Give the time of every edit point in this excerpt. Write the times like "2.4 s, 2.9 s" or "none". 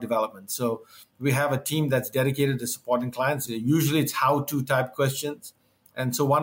3.5 s